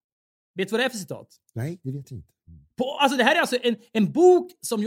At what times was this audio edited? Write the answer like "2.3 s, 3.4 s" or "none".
none